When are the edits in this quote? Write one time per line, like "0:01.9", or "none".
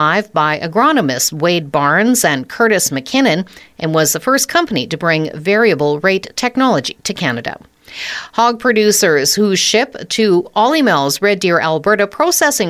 none